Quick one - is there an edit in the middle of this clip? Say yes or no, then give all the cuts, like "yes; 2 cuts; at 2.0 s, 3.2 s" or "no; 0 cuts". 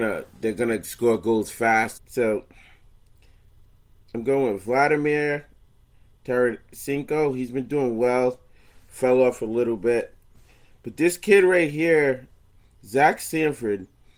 yes; 1 cut; at 2.0 s